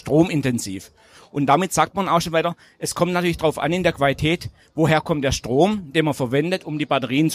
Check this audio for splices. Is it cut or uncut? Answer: uncut